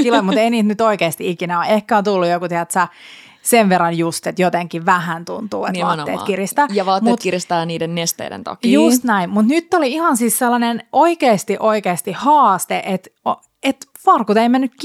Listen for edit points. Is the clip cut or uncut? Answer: uncut